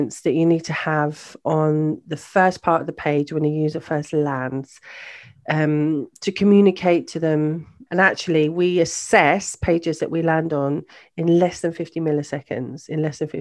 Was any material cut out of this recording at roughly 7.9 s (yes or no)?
yes